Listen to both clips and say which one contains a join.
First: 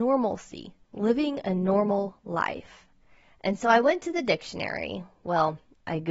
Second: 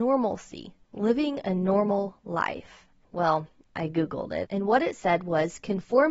second; 2 cuts; at 3.0 s, 4.4 s

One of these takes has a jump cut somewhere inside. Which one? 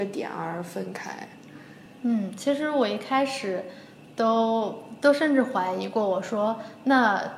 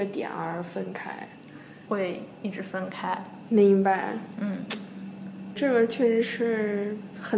second; 2 cuts; at 1.9 s, 5.5 s

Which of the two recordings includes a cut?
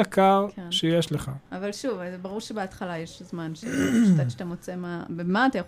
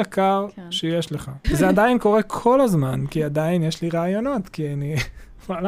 second; 1 cut; at 1.4 s

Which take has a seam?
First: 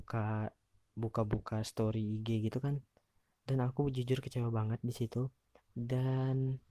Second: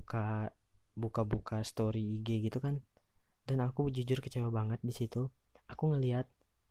first; 1 cut; at 5.6 s

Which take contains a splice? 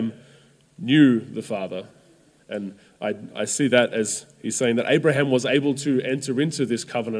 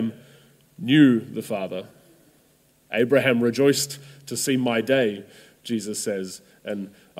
first; 1 cut; at 2.4 s

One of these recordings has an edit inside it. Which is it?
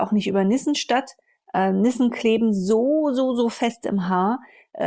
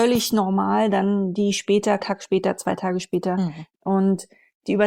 second; 2 cuts; at 2.0 s, 3.7 s

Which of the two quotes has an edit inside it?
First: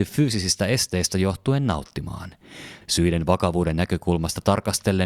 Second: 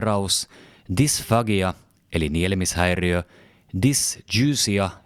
first; 1 cut; at 2.8 s

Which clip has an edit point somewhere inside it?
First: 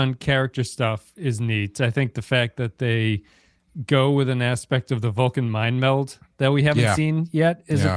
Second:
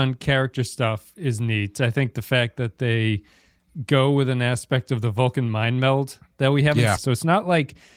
second; 1 cut; at 7.0 s

